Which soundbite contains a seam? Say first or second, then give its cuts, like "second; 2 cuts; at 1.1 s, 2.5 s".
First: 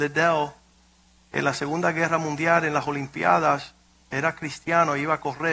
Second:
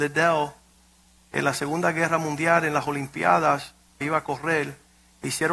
second; 1 cut; at 4.0 s